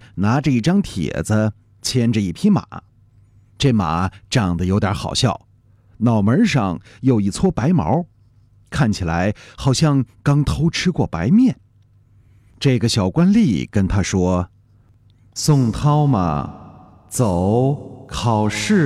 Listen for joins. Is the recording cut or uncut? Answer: uncut